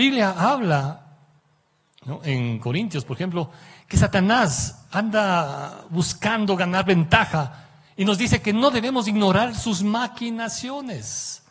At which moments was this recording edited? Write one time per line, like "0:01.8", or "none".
none